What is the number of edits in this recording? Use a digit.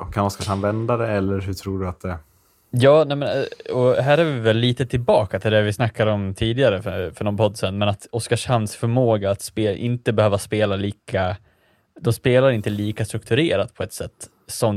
0